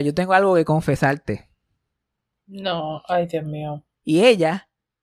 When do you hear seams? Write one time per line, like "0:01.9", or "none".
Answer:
0:04.0